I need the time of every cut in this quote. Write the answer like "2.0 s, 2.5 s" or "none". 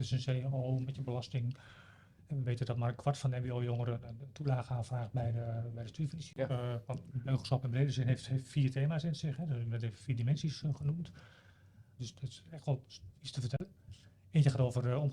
6.5 s, 12.0 s, 13.2 s